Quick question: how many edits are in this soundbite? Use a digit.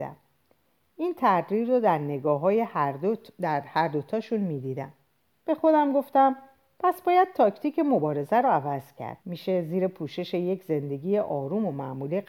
2